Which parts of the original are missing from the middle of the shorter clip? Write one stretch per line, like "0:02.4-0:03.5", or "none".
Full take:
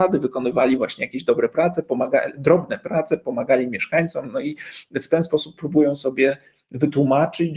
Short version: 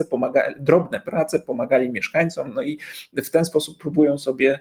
none